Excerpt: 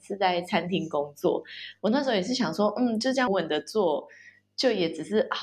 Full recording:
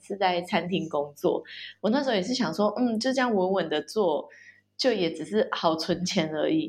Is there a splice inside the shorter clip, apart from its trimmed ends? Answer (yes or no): yes